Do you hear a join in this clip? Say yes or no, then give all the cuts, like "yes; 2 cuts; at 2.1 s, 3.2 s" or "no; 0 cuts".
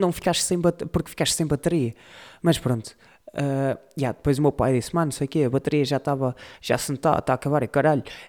no; 0 cuts